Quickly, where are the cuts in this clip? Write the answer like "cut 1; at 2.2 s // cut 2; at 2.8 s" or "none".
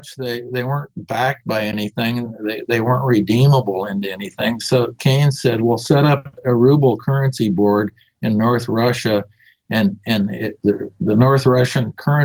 cut 1; at 10.6 s